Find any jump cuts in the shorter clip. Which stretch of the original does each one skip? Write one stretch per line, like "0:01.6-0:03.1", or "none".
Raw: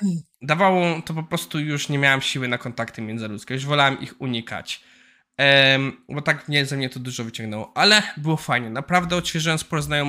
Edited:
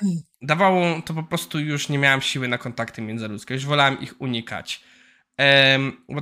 none